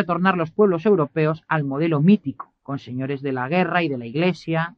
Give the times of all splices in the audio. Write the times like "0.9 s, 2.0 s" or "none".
2.6 s